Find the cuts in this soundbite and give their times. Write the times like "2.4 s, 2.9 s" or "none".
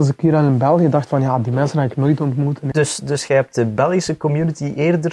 2.7 s